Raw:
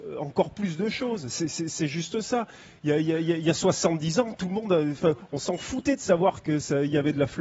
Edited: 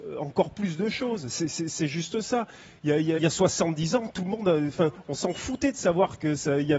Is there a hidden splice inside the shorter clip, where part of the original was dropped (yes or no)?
yes